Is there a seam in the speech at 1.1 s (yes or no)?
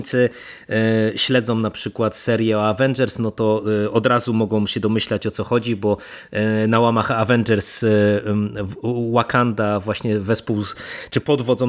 no